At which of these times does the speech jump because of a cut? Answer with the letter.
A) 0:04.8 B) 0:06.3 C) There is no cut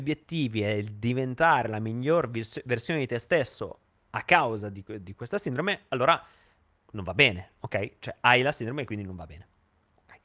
C